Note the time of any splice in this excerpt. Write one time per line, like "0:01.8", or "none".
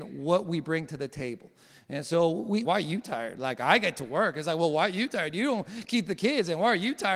0:02.6